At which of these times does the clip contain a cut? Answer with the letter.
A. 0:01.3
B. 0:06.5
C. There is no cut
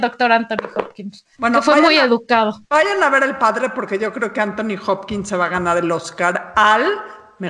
A